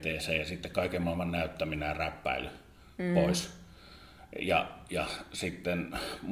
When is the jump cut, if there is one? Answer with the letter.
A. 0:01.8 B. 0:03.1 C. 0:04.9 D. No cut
D